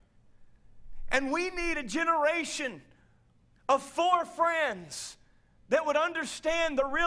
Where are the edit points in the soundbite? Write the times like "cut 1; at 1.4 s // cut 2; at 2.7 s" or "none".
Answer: none